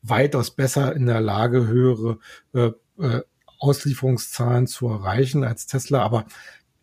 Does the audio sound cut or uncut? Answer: uncut